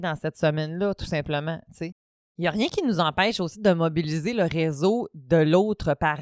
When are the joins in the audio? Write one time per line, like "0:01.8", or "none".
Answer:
none